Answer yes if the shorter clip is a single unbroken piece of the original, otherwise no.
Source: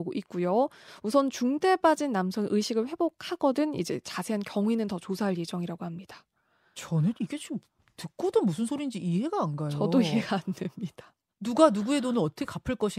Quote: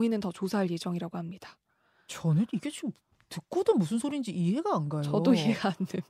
yes